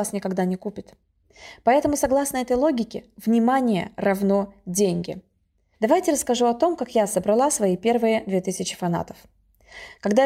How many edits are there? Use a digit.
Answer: 1